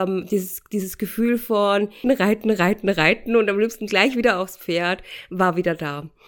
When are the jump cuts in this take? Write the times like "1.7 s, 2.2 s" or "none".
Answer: 2.0 s